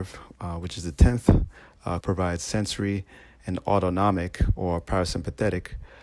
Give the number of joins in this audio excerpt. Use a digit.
1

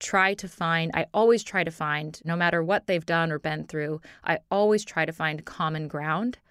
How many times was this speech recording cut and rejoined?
1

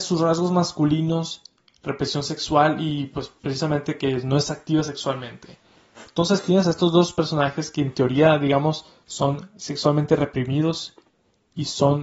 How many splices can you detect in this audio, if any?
1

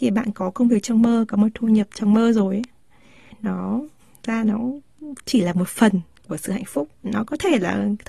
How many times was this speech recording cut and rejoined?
1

